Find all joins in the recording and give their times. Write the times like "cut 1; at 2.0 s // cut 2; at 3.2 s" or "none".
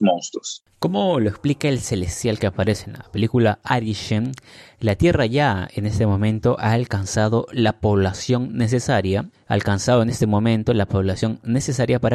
cut 1; at 9.3 s